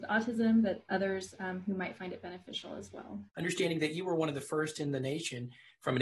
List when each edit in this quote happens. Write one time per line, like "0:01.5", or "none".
0:03.3